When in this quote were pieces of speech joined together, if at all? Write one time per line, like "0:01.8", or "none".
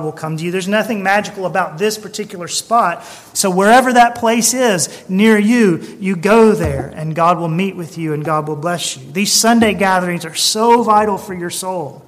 0:03.3